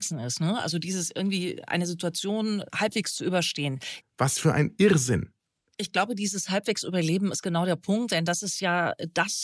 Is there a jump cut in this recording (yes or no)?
yes